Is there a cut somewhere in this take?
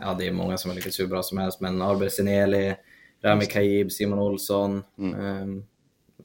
no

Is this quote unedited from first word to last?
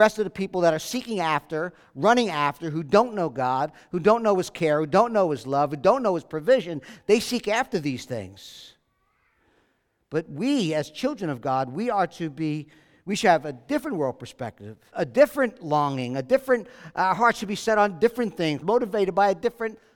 no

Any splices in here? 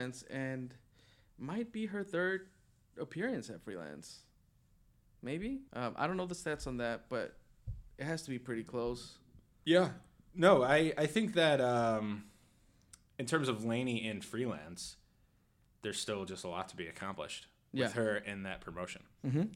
yes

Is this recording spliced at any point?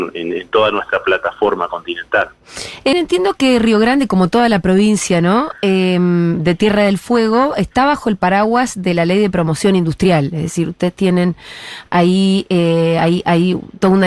yes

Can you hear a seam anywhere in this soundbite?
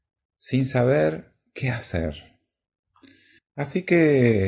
yes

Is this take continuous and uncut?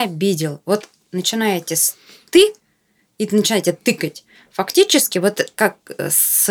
yes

